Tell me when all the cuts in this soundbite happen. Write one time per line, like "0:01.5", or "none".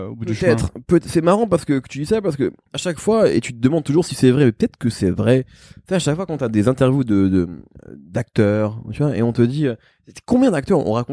none